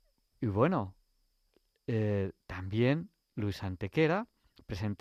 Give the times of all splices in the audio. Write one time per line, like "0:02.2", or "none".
none